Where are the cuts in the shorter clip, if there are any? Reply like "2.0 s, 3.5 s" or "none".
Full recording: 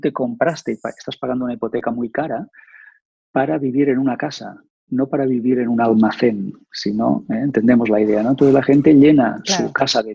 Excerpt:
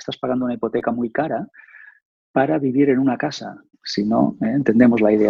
3.7 s